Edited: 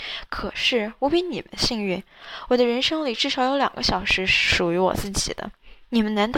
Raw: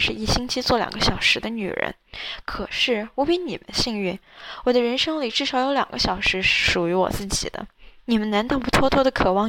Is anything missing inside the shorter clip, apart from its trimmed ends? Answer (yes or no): no